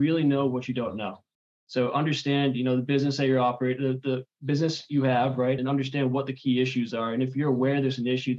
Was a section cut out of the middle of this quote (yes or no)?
yes